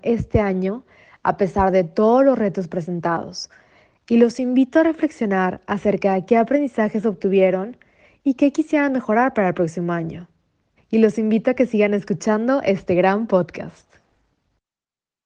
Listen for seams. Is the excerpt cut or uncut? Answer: cut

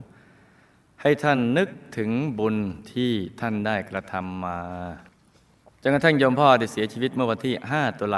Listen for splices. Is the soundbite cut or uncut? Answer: uncut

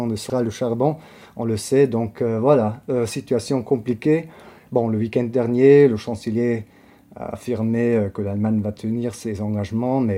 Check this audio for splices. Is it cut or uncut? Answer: uncut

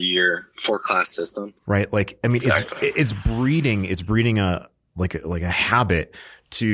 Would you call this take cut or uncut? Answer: cut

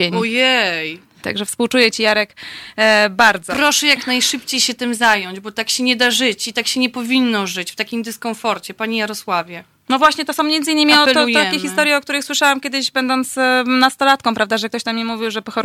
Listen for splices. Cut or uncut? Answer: cut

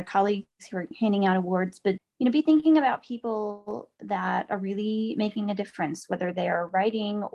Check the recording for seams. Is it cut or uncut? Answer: cut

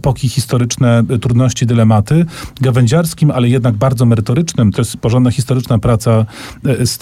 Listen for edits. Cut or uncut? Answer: cut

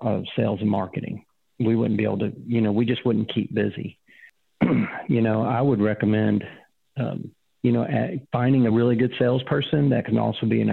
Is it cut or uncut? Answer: uncut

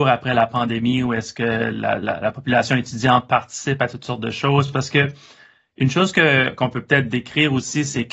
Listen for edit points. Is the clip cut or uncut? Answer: uncut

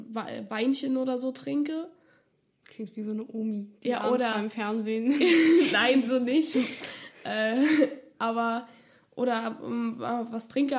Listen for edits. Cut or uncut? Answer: uncut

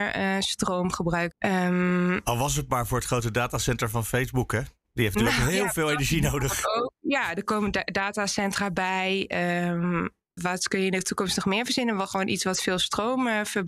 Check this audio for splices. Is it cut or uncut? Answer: cut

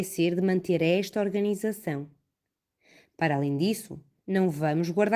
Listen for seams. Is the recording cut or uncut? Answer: uncut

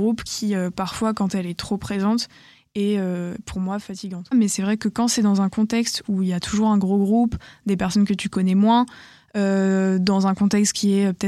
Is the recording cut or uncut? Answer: cut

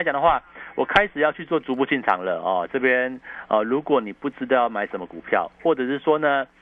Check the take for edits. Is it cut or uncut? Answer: uncut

